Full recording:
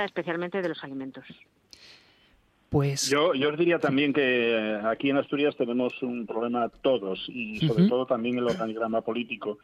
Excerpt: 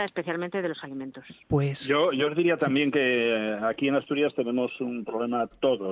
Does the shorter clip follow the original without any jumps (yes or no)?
no